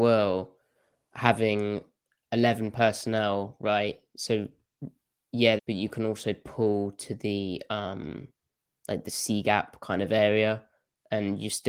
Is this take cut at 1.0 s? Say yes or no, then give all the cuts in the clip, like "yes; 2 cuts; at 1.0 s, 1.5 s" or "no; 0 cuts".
no; 1 cut; at 5.6 s